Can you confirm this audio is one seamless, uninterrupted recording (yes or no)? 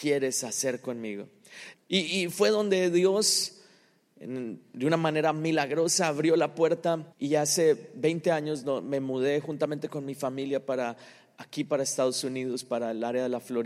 no